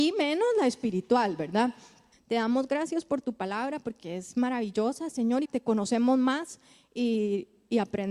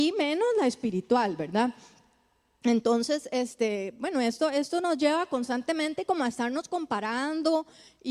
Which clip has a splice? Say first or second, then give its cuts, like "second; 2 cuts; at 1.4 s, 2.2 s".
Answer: first; 2 cuts; at 2.1 s, 5.4 s